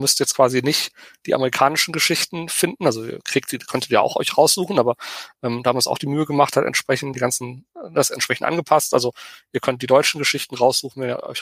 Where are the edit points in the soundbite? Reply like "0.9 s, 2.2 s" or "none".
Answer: 7.1 s